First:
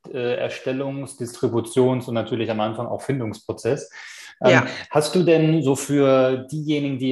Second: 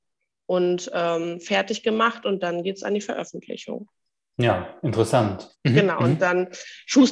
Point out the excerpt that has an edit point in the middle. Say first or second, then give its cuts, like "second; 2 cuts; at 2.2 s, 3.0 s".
second; 1 cut; at 5.5 s